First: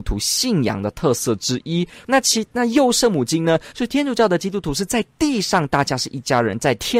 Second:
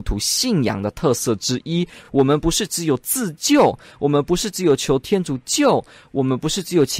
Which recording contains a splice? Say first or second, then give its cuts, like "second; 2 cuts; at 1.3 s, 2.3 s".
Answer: first; 2 cuts; at 2.0 s, 3.7 s